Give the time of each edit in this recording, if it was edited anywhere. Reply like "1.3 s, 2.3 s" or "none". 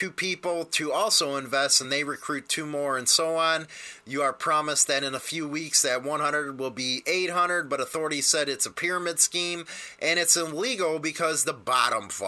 none